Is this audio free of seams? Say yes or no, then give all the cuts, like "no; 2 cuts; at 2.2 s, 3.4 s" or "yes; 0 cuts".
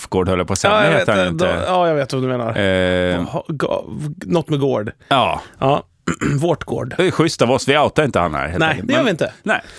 yes; 0 cuts